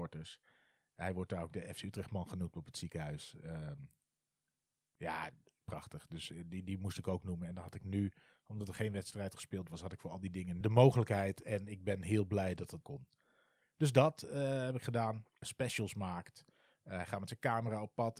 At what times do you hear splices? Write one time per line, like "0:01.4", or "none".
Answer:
0:10.6
0:12.8
0:15.4